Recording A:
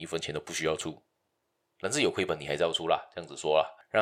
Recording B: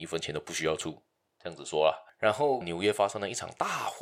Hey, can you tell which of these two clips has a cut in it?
B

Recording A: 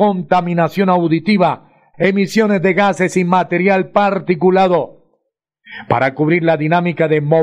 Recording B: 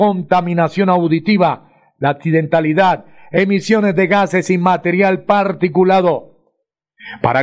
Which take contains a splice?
A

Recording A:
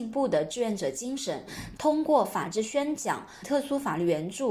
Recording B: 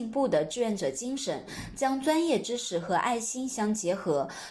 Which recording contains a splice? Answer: A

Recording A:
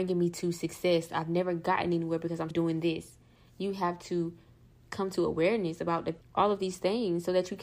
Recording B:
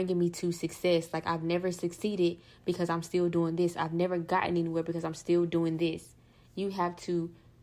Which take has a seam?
A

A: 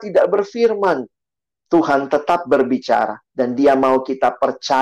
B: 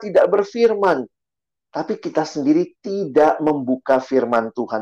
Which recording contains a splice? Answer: A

